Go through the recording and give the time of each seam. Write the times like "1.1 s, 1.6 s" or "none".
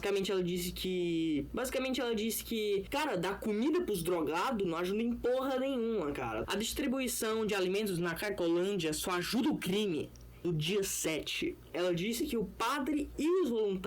6.4 s, 10.4 s